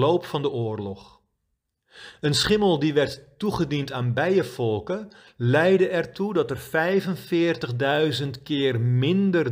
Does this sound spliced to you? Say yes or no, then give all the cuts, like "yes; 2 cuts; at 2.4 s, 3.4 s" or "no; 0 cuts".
no; 0 cuts